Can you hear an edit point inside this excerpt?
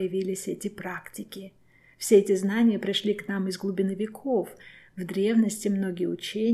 no; 0 cuts

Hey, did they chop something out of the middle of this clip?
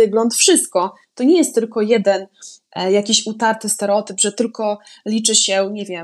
yes; 1 cut; at 1.0 s

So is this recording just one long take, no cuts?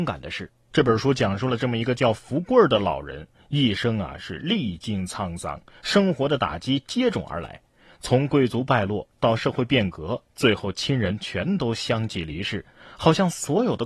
yes; 0 cuts

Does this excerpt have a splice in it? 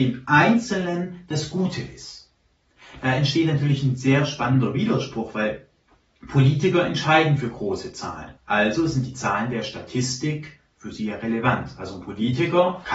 yes; 1 cut; at 8.4 s

